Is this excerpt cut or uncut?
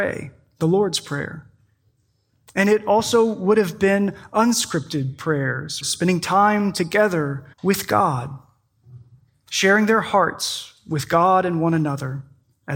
cut